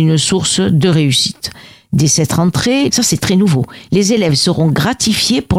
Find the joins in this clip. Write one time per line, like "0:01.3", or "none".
0:02.9